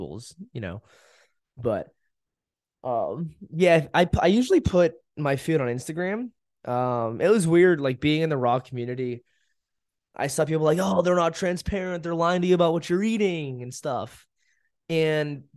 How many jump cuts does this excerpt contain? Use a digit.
0